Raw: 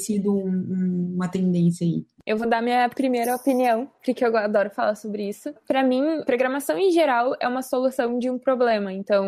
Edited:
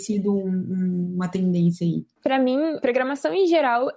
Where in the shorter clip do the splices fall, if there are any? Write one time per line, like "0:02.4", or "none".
0:02.2

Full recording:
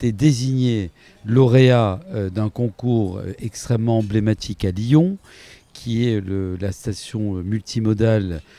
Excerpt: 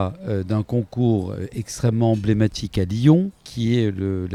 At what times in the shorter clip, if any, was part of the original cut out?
0:03.4

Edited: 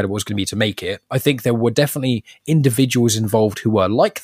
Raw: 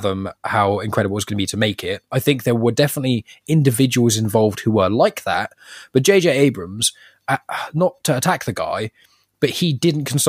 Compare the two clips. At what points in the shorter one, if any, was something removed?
none

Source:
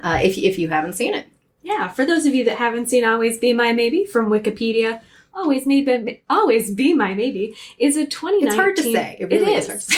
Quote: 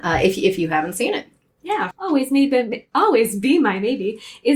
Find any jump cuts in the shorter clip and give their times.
0:01.9

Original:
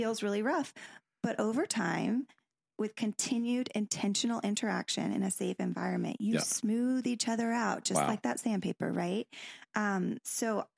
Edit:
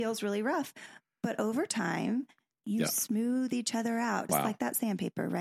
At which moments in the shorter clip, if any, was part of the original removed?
0:02.6
0:04.3

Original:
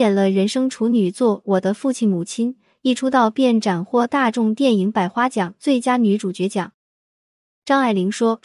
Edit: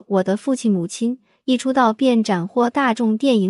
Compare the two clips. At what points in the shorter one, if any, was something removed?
none

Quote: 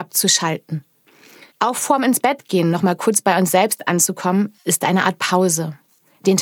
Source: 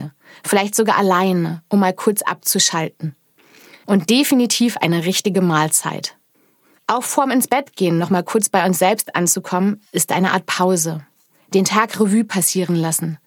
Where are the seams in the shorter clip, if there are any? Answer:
0:01.5

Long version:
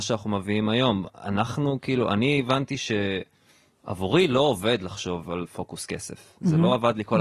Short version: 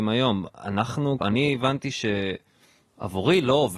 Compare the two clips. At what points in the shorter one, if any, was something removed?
0:01.2

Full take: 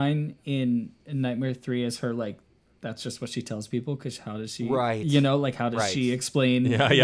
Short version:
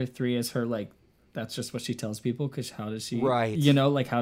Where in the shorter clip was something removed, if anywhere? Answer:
none

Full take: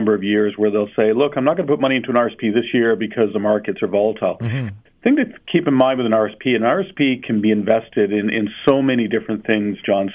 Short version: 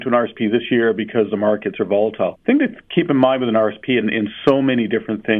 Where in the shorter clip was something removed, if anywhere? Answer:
0:02.3
0:04.0

